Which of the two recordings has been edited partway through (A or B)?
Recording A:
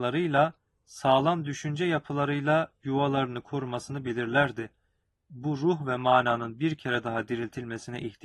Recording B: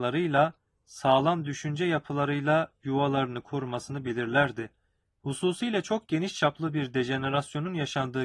B